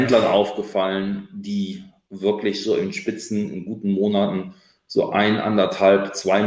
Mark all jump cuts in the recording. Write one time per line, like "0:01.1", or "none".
none